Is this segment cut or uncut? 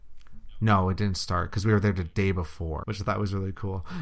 cut